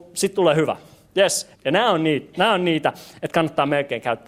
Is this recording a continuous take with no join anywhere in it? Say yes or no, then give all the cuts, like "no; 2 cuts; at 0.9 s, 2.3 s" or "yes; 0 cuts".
no; 1 cut; at 1.5 s